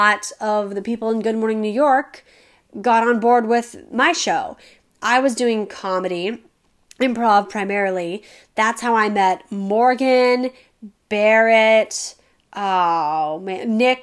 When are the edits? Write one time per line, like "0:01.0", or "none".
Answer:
none